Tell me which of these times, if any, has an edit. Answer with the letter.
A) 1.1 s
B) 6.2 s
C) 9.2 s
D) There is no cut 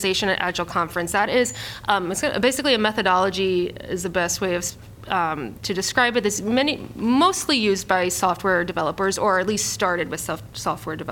D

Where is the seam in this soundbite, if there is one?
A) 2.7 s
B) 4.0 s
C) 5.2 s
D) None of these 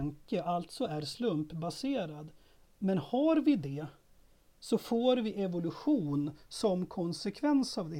D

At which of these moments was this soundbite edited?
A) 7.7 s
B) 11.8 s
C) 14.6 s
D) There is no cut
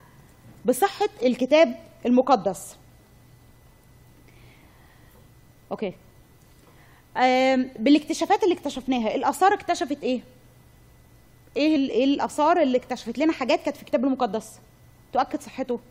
B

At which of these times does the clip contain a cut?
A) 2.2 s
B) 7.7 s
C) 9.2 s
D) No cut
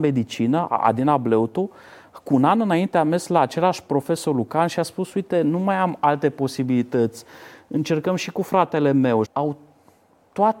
C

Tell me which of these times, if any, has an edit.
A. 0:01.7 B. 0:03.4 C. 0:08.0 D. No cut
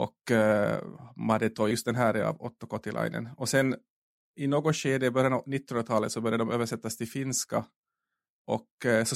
A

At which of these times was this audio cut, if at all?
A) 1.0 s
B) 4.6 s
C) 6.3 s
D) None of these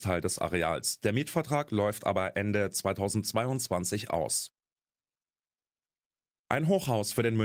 D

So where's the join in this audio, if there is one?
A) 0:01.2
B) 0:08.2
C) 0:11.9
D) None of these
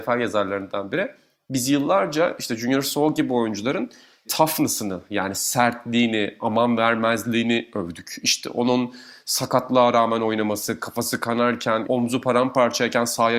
C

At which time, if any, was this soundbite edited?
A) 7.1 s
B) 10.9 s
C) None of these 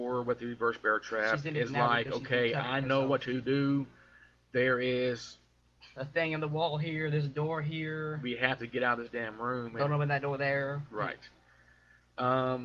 C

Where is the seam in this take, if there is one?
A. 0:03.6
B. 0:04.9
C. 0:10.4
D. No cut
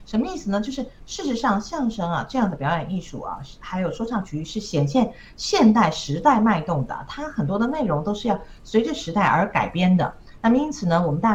D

